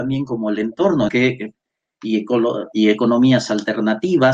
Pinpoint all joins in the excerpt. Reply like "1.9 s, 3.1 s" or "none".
1.1 s